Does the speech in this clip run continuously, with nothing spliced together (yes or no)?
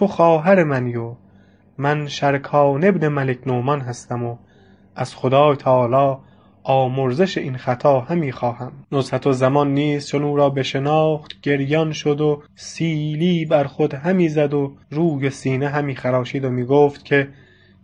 no